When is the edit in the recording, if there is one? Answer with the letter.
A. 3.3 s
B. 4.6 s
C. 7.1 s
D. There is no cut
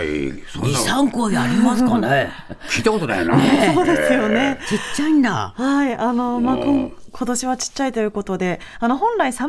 D